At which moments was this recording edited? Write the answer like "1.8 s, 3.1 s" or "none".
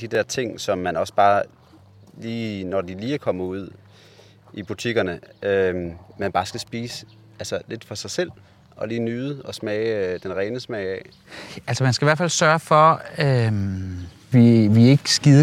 none